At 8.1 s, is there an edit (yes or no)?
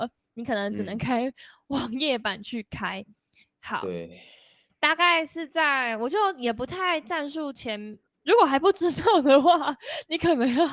yes